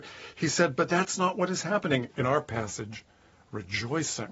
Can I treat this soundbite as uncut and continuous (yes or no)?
no